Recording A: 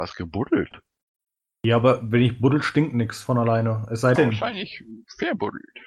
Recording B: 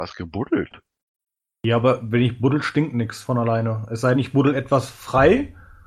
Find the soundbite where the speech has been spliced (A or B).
A